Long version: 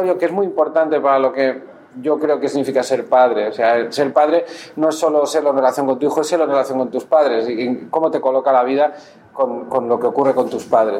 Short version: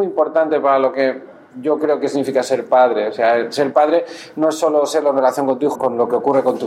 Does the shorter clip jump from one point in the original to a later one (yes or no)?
yes